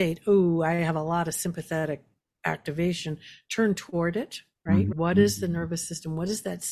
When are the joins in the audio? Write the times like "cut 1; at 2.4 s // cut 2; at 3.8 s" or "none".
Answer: cut 1; at 4.9 s